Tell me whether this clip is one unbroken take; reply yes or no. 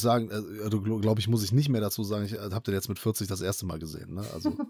yes